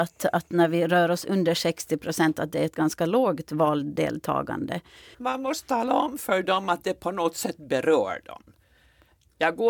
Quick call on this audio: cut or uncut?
cut